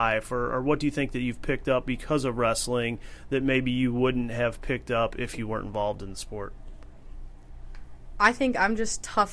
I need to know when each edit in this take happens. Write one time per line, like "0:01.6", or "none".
none